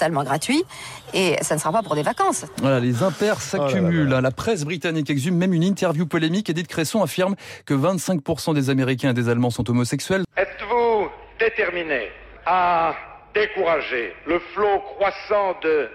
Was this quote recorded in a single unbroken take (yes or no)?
no